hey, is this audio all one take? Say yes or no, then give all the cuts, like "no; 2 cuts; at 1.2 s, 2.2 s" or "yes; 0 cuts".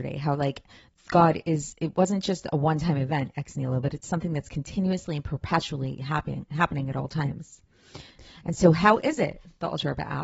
yes; 0 cuts